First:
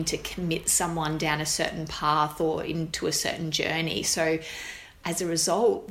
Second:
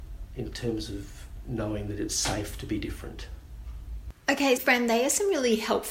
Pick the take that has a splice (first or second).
second